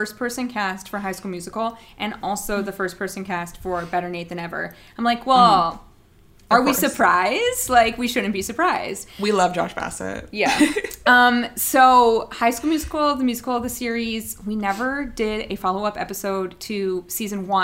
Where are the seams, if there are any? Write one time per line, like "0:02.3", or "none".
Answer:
none